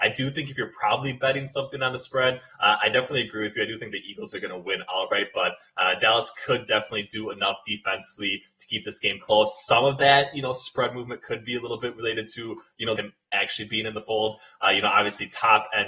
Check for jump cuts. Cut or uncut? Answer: cut